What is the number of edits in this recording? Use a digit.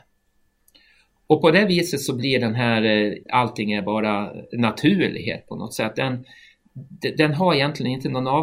1